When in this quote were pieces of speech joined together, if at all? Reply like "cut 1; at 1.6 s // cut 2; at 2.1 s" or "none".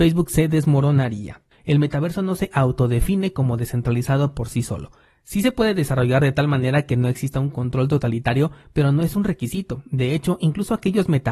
cut 1; at 1.5 s

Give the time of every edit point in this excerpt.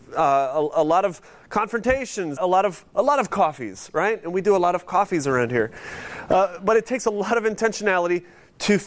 cut 1; at 2.4 s

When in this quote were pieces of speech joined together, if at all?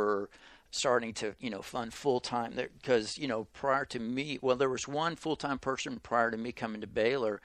none

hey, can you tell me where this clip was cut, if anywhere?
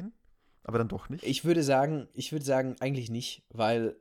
none

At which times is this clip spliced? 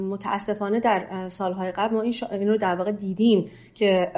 none

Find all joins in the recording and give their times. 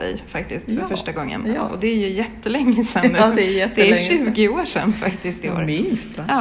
none

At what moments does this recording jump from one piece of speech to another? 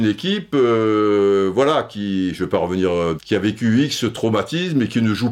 cut 1; at 3.2 s

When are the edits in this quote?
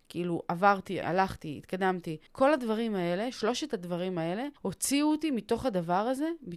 cut 1; at 1.0 s // cut 2; at 2.3 s // cut 3; at 4.6 s

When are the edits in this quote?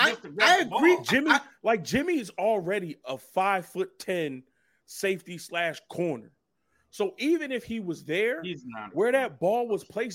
none

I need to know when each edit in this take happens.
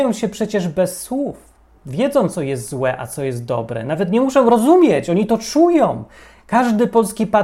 none

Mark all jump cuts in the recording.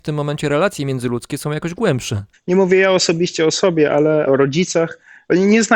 cut 1; at 2.3 s // cut 2; at 4.3 s

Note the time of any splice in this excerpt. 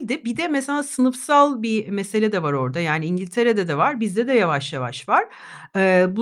none

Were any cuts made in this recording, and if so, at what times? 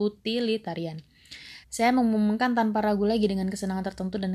cut 1; at 1.6 s

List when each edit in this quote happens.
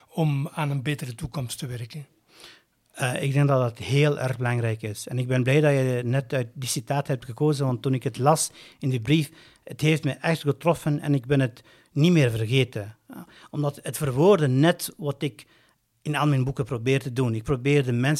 none

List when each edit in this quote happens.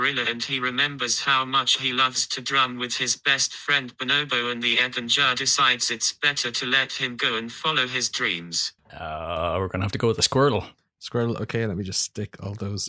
cut 1; at 8.8 s

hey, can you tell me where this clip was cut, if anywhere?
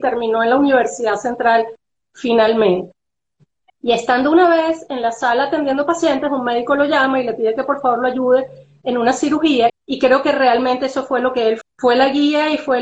cut 1; at 3.7 s // cut 2; at 9.7 s // cut 3; at 11.6 s

